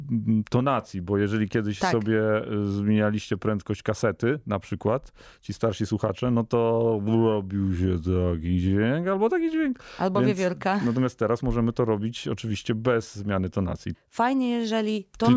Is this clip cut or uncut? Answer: cut